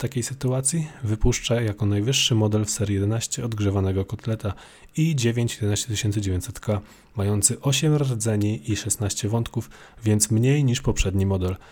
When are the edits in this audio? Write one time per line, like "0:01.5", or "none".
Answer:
none